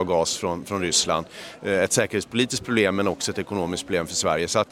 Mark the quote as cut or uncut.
uncut